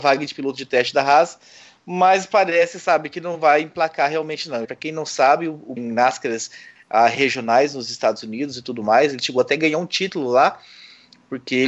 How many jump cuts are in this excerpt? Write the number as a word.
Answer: two